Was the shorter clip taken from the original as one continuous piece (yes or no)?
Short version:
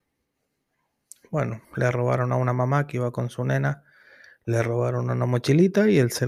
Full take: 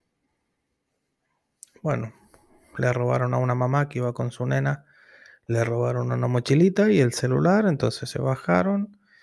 no